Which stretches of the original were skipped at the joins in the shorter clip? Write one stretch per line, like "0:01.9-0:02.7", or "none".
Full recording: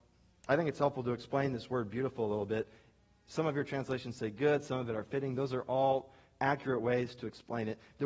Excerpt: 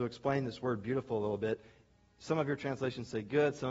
none